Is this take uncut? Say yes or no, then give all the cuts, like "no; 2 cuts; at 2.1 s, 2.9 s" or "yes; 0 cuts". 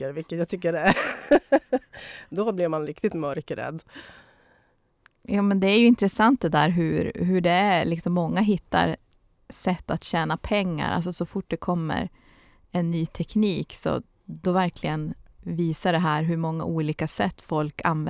yes; 0 cuts